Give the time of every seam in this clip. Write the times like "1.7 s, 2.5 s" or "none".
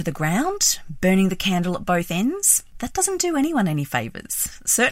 2.8 s